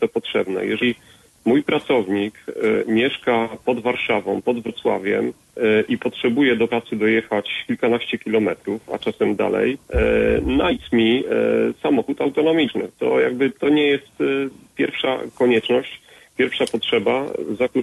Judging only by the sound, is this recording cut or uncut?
uncut